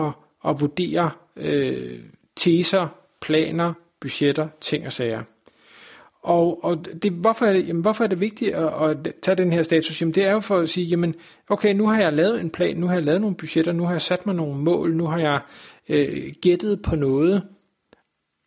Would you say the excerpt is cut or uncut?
uncut